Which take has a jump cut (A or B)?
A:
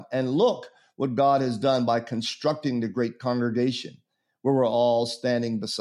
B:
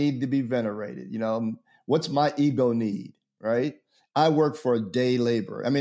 B